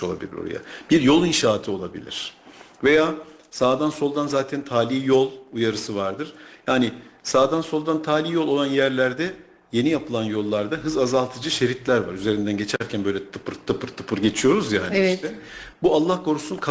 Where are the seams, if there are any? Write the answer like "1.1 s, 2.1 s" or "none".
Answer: 15.7 s